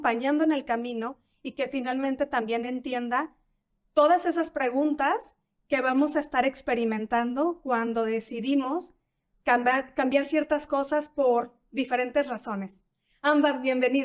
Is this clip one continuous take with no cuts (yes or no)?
yes